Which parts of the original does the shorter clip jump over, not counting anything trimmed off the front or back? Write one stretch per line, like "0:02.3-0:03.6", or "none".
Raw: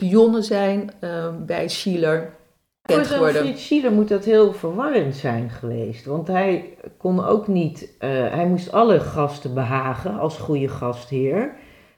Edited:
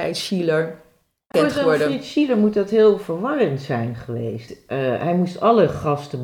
0:06.0-0:07.8

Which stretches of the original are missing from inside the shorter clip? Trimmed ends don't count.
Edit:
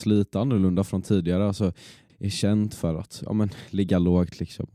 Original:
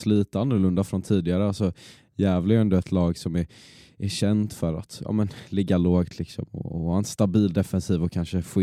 0:02.1-0:03.9

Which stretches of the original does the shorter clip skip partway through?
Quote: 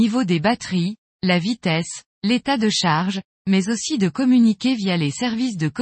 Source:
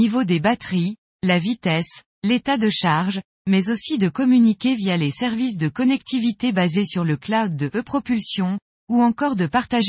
none

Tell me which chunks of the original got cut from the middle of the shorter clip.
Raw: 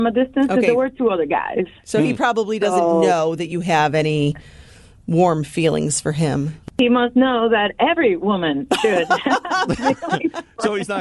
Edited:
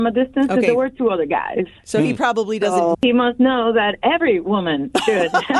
0:02.9-0:06.7

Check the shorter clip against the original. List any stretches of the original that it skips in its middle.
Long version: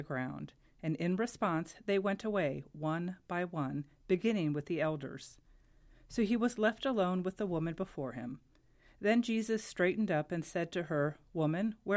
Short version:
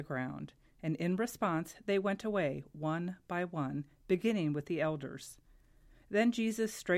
0:06.0-0:08.9

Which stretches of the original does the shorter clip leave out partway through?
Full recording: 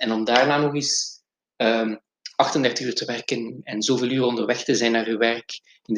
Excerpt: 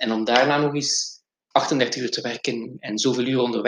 0:01.5-0:02.3

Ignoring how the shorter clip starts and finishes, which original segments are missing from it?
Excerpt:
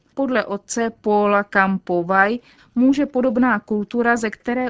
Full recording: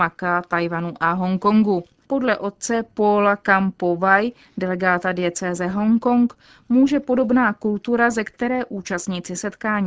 0:04.5-0:06.5

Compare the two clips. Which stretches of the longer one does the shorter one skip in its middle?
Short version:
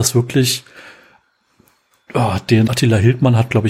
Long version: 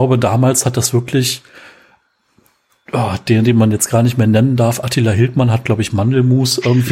0:03.5-0:04.8

